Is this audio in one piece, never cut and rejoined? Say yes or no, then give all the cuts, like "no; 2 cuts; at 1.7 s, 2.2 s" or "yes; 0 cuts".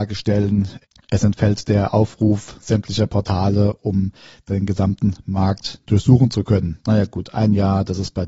no; 1 cut; at 6.8 s